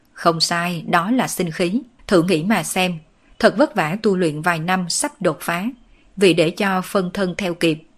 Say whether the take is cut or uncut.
cut